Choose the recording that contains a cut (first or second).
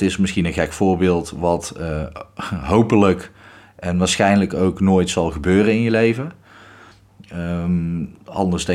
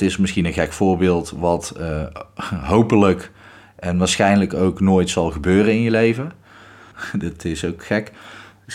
second